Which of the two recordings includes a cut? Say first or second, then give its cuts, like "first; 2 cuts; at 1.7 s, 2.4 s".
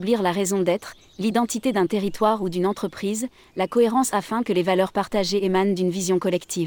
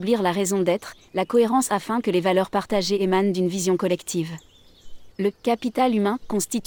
second; 2 cuts; at 1.1 s, 5.1 s